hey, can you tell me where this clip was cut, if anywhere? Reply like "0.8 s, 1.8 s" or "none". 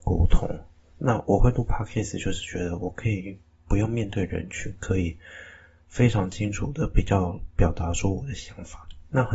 none